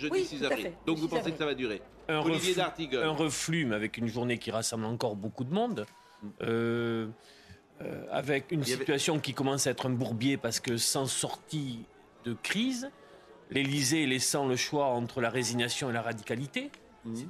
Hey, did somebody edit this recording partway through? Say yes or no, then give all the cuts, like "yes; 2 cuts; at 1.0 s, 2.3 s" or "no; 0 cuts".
yes; 1 cut; at 8.5 s